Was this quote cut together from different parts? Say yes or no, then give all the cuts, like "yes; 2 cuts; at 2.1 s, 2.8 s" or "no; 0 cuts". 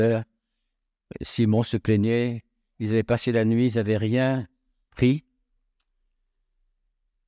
no; 0 cuts